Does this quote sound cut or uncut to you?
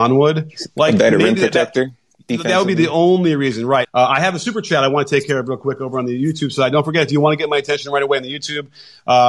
cut